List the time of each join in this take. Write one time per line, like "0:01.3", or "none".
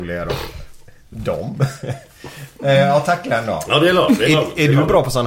none